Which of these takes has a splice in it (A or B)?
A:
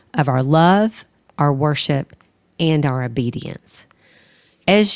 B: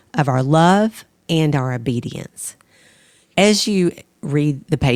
B